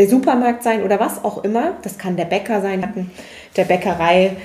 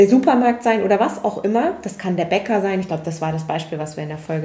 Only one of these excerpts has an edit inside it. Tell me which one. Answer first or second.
first